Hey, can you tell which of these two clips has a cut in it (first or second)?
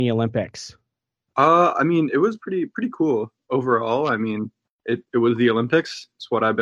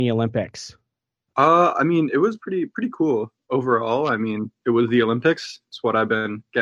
second